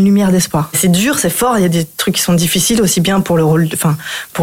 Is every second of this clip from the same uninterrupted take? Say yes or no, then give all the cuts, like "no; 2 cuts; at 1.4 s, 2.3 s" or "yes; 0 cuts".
yes; 0 cuts